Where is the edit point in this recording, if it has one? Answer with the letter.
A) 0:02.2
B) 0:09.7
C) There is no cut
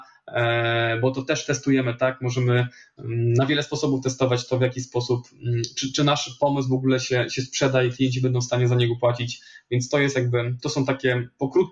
C